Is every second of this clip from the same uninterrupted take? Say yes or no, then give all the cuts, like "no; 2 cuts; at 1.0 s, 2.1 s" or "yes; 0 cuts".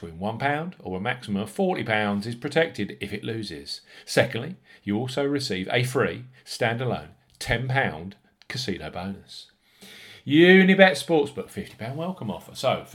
yes; 0 cuts